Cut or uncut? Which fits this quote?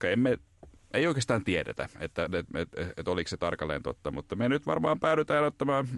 uncut